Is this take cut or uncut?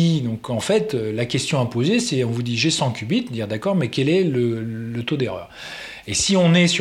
uncut